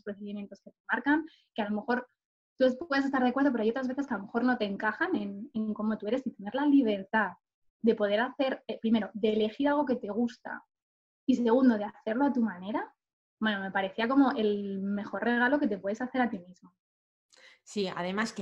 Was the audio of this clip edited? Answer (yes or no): no